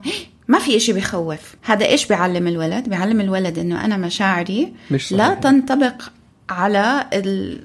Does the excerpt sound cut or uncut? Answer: cut